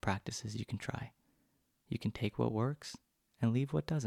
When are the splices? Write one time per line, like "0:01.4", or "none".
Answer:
none

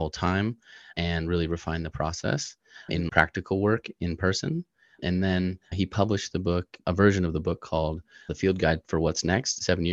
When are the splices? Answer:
0:03.1

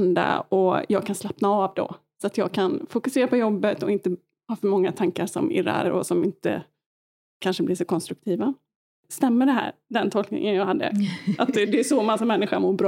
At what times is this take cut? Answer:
0:11.6

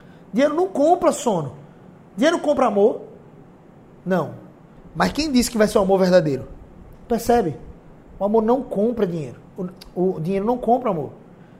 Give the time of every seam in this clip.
0:04.8
0:06.9

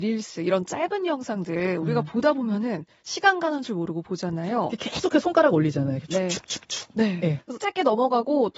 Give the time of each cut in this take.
0:07.6

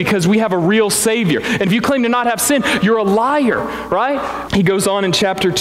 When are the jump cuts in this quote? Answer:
0:04.5

